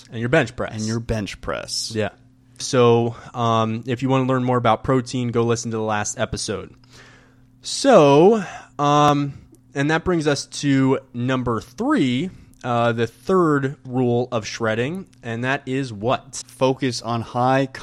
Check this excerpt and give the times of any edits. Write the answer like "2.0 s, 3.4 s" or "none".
2.6 s, 16.4 s